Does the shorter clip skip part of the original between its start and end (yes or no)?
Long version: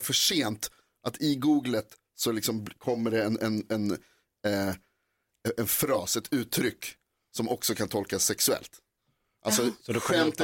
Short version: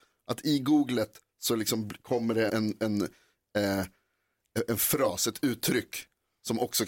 yes